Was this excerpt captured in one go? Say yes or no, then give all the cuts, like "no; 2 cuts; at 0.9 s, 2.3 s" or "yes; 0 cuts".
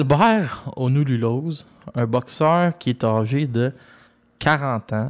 yes; 0 cuts